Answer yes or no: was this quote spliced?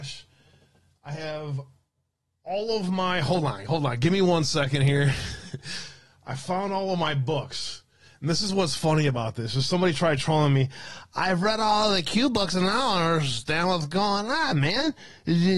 no